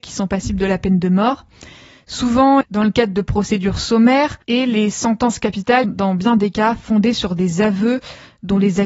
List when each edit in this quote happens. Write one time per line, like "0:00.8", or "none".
0:02.6
0:04.4
0:05.8